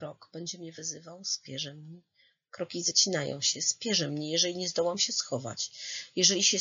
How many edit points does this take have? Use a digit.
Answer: 0